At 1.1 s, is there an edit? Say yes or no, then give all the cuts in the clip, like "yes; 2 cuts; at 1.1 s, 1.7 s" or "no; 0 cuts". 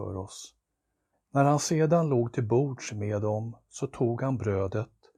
yes; 1 cut; at 1.1 s